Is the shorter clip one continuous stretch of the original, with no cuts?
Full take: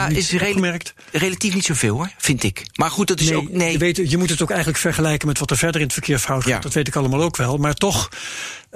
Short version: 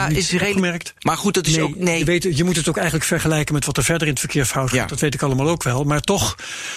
no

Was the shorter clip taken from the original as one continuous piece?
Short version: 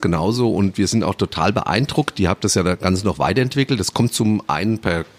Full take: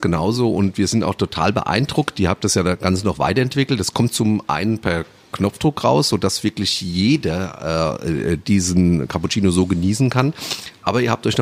yes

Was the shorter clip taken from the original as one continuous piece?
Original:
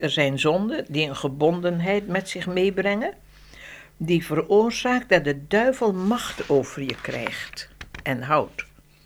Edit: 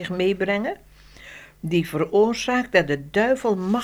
yes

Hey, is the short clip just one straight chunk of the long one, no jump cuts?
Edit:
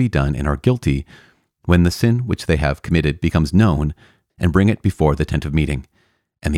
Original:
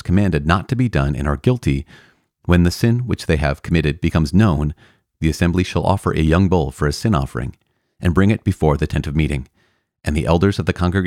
no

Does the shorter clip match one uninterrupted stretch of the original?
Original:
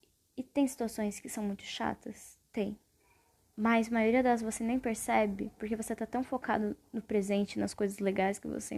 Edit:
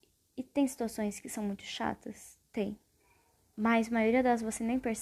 yes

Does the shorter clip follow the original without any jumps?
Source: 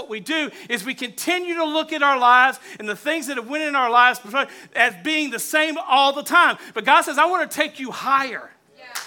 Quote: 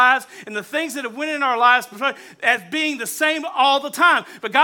yes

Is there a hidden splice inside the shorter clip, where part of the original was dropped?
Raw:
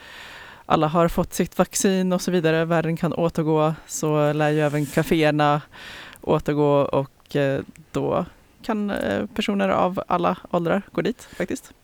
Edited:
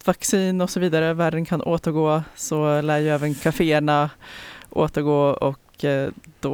no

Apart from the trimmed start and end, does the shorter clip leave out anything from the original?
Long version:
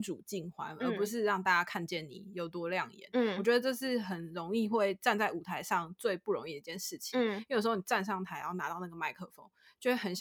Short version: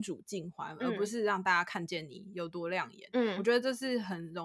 no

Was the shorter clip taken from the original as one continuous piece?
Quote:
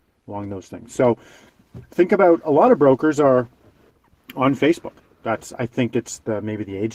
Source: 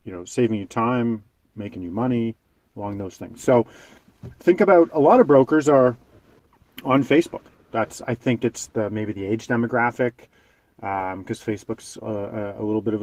yes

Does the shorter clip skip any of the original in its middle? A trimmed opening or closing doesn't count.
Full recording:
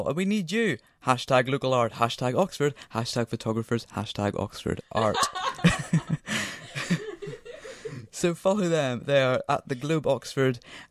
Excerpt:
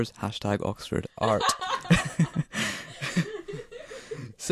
no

